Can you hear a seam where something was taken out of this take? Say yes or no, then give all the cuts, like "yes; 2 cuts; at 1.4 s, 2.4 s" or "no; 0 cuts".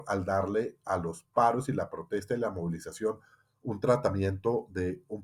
no; 0 cuts